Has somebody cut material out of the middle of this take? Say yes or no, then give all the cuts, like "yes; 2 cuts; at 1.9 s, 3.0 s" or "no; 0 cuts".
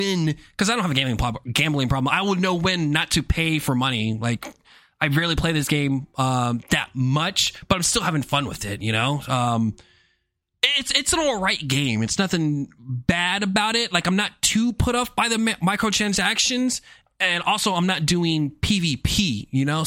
no; 0 cuts